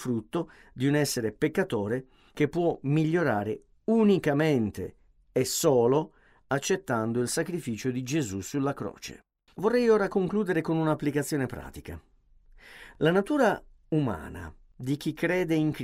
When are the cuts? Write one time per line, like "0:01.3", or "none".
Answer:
0:09.5